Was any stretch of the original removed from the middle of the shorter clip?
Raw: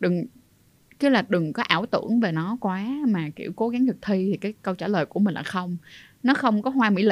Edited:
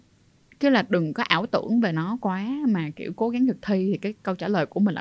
no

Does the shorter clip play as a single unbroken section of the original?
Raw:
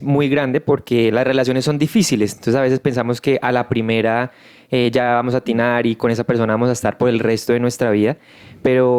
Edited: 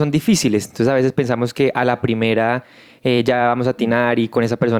yes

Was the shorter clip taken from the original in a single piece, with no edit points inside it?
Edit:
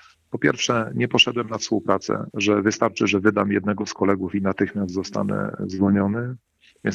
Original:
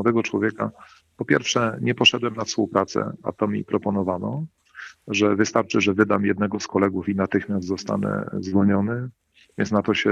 no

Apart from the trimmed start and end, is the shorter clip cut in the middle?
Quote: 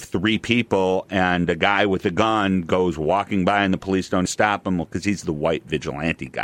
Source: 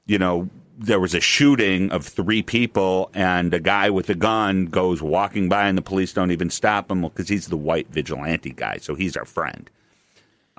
yes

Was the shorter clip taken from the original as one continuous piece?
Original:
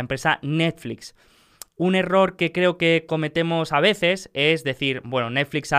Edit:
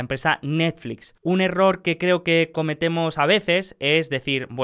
no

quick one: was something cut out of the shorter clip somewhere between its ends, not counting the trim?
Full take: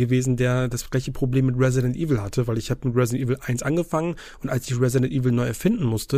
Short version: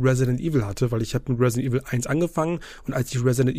no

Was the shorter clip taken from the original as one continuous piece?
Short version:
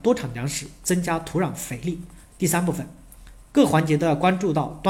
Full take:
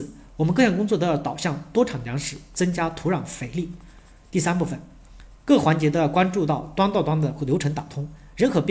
no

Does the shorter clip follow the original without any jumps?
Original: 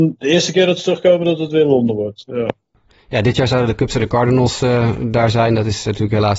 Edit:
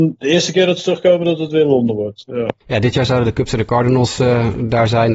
no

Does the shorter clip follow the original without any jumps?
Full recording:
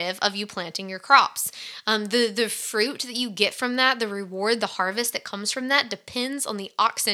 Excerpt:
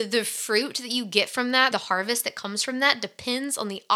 no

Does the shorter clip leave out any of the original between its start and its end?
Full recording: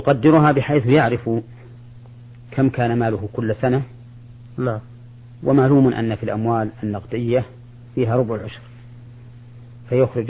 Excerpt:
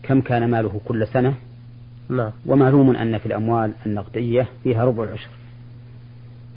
yes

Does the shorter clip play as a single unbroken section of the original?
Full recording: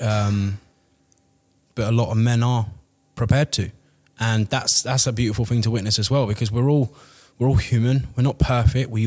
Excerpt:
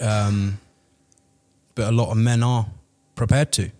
yes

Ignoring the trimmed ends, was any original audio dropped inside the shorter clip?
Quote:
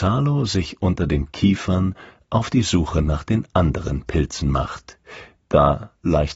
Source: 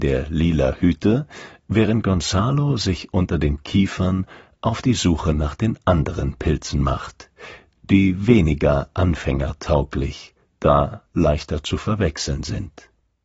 yes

